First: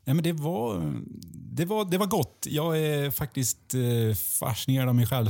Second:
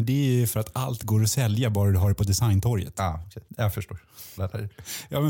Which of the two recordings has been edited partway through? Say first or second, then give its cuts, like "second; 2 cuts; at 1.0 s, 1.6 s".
second; 1 cut; at 4.4 s